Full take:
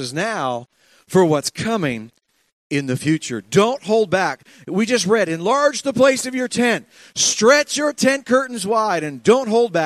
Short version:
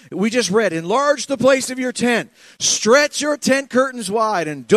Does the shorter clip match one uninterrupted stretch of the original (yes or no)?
yes